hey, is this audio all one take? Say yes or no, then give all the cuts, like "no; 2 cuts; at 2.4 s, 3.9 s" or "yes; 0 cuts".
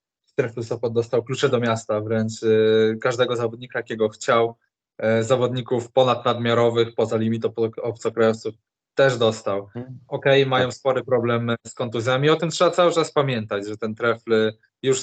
yes; 0 cuts